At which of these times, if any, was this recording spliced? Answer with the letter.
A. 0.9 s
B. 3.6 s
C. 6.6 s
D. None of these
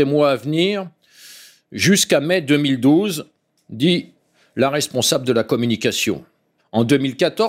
C